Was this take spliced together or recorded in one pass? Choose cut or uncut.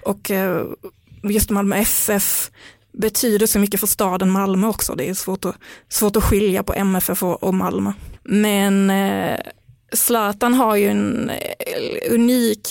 cut